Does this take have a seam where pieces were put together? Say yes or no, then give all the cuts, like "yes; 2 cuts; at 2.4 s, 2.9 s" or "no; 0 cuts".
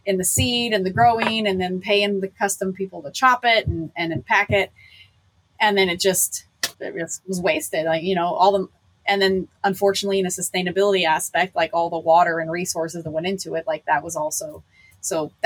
yes; 1 cut; at 6.7 s